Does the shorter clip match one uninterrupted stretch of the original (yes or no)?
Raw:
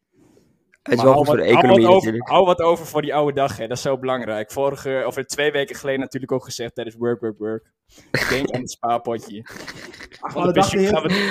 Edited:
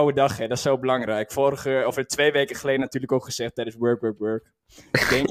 yes